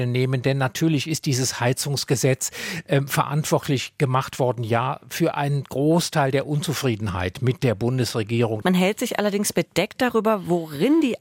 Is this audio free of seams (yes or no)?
no